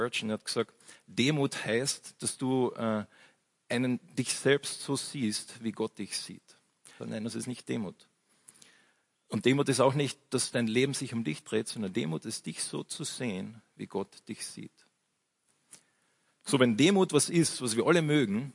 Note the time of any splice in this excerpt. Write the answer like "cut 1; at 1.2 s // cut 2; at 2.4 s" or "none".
cut 1; at 7.0 s